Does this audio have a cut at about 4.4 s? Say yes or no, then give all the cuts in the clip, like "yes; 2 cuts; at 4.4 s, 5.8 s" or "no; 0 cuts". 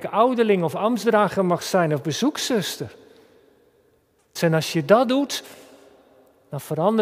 yes; 1 cut; at 4.4 s